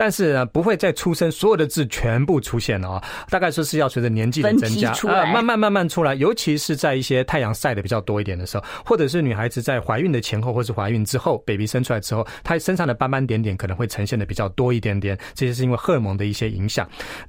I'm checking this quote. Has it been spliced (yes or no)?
no